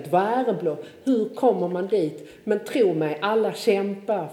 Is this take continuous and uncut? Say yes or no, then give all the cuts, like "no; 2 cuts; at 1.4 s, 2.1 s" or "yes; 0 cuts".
yes; 0 cuts